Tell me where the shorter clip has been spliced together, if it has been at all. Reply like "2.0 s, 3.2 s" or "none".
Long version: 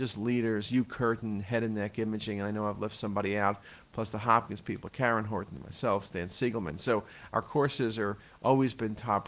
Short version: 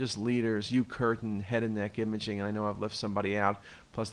none